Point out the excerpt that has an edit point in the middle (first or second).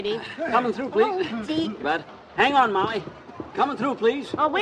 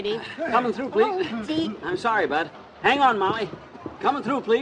first